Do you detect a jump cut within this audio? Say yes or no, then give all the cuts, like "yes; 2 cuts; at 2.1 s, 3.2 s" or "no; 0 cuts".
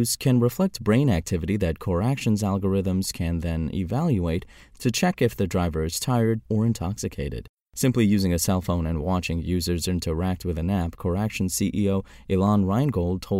yes; 1 cut; at 6.4 s